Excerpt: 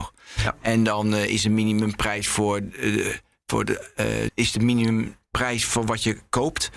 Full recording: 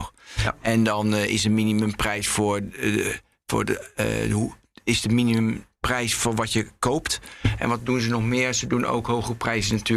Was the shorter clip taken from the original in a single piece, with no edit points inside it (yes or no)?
no